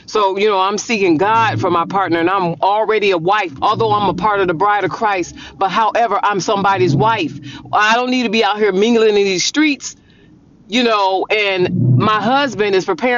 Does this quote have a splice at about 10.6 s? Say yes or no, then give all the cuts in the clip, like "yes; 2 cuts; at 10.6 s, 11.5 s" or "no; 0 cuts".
no; 2 cuts; at 3.6 s, 6.4 s